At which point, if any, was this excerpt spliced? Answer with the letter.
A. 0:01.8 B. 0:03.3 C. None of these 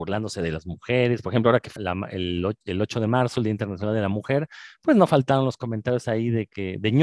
A